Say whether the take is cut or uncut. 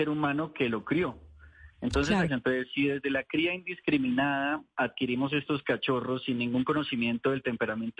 cut